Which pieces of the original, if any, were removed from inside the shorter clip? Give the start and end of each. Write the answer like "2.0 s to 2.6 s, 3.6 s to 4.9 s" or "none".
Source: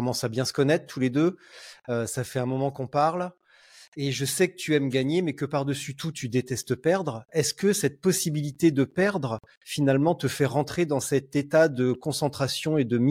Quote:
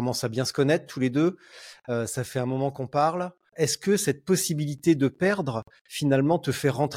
3.5 s to 7.3 s